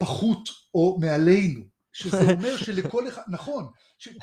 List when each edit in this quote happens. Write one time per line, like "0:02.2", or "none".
0:01.9